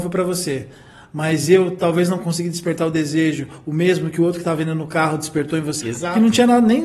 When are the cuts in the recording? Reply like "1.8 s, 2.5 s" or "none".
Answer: 5.8 s